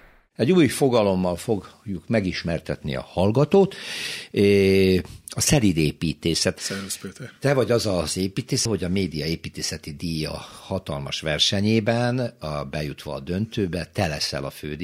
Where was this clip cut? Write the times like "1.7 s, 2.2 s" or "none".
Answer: 6.6 s, 8.7 s